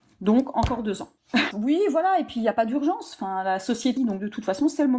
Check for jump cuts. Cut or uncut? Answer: cut